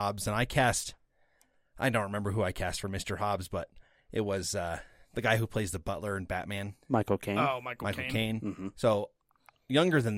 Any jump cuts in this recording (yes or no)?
no